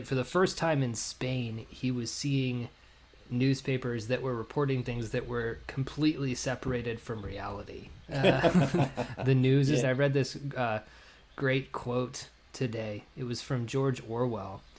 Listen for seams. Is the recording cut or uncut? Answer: cut